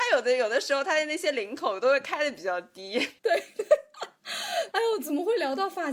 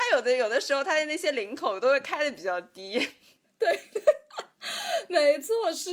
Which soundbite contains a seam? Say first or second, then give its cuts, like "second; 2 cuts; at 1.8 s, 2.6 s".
first; 2 cuts; at 3.2 s, 4.7 s